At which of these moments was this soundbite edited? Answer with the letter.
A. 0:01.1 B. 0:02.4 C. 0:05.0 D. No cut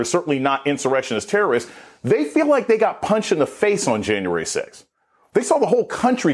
D